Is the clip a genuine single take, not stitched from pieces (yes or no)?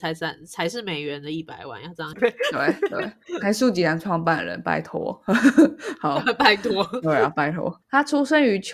no